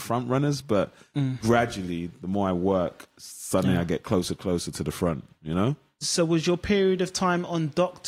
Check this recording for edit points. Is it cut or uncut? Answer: uncut